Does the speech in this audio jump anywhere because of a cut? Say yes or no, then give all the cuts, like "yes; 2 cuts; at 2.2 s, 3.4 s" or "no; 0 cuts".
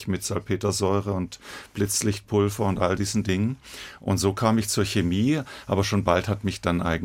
no; 0 cuts